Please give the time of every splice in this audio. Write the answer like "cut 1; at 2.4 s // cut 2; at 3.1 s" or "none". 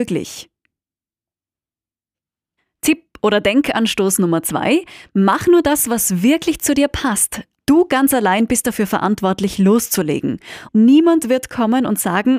cut 1; at 7.5 s // cut 2; at 10.7 s